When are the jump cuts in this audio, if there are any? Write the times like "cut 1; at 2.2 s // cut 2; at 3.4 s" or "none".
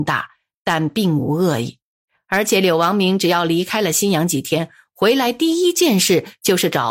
none